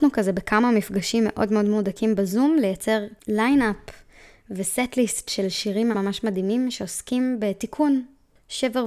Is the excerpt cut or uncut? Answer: cut